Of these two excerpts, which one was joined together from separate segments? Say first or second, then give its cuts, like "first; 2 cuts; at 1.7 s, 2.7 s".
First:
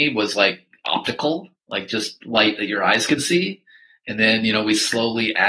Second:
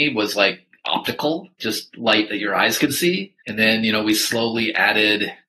second; 2 cuts; at 1.6 s, 3.4 s